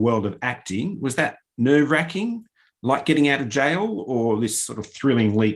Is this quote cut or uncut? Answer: uncut